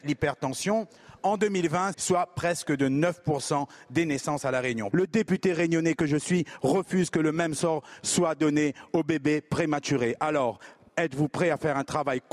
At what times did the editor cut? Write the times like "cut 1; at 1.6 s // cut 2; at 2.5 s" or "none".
cut 1; at 1.9 s // cut 2; at 4.9 s